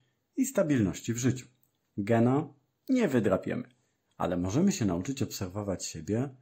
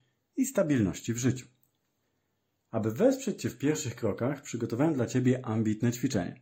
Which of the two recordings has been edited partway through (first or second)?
first